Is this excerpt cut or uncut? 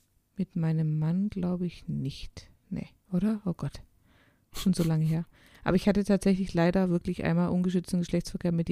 uncut